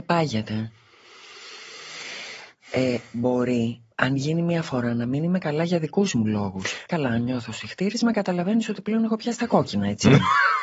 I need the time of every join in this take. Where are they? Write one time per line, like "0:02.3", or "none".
0:03.9
0:06.9